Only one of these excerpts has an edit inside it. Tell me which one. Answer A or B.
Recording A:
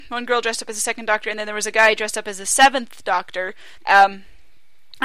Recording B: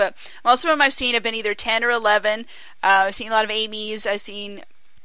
A